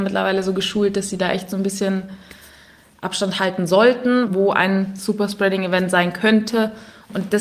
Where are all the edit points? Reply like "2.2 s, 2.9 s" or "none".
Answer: 4.3 s